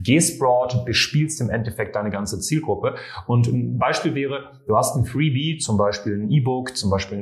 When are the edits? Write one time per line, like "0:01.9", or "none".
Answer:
none